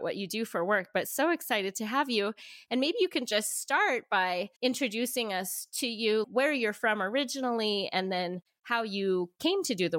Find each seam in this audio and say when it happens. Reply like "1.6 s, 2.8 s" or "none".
4.6 s, 6.2 s

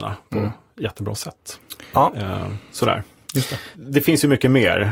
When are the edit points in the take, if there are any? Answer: 1.9 s, 3.7 s

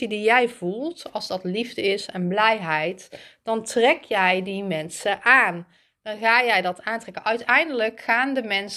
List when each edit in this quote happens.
none

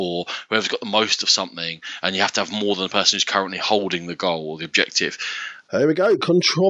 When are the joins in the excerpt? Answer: 5.7 s

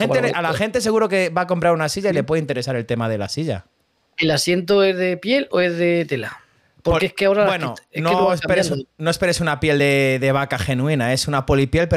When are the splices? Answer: none

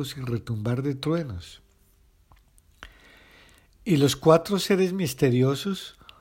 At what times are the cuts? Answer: none

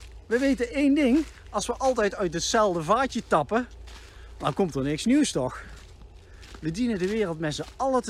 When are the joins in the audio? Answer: none

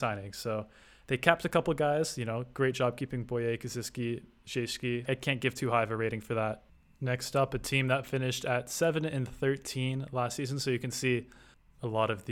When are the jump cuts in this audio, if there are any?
5.1 s

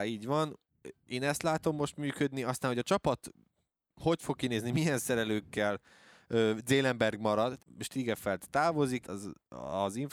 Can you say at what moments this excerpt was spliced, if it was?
7.6 s, 9.0 s

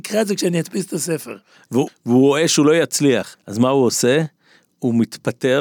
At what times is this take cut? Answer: 1.9 s, 3.3 s

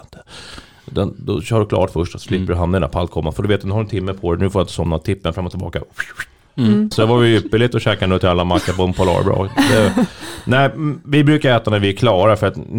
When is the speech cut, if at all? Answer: 6.9 s

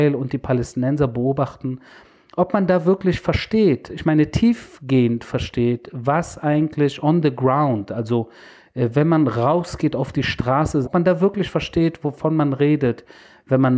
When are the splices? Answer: 10.8 s

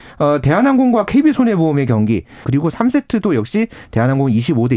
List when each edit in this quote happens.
2.4 s

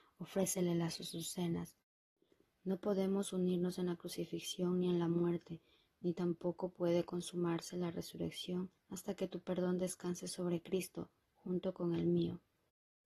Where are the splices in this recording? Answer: 2.4 s, 8.8 s

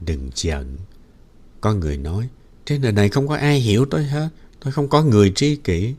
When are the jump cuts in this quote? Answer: none

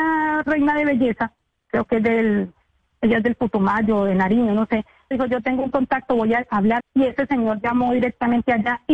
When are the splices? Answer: 5.1 s, 6.8 s

